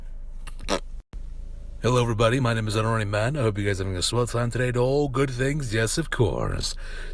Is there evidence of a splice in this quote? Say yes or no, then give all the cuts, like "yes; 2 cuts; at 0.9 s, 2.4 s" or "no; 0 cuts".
no; 0 cuts